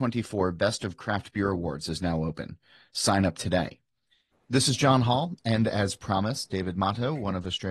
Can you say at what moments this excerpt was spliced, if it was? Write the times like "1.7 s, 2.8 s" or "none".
4.3 s